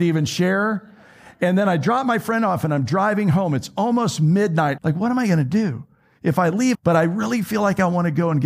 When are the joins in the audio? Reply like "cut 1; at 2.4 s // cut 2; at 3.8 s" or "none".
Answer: cut 1; at 4.8 s // cut 2; at 6.7 s